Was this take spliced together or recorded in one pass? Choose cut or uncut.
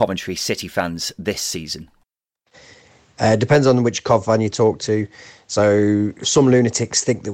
uncut